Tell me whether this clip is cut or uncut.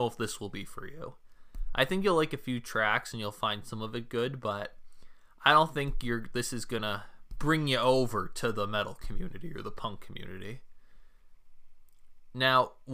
uncut